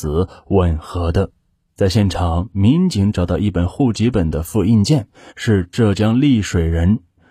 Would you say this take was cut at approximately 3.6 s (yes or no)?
no